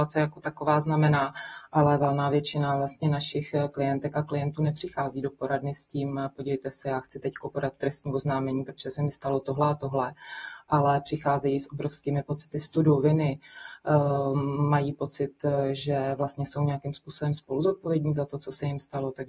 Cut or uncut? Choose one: cut